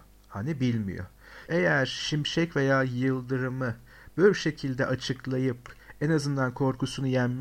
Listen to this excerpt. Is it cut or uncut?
cut